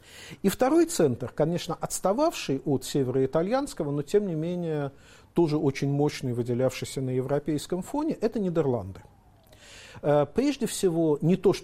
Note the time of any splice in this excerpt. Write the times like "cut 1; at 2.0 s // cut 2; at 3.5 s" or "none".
none